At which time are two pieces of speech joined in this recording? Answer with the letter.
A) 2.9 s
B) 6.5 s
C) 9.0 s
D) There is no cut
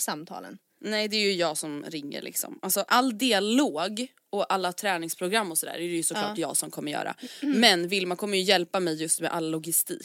A